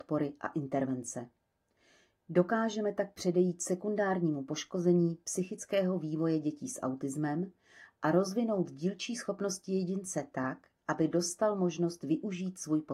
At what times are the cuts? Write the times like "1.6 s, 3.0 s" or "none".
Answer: none